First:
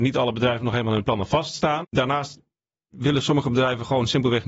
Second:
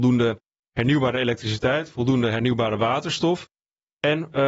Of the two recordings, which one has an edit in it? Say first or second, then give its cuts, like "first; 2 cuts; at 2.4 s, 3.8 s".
first; 1 cut; at 1.8 s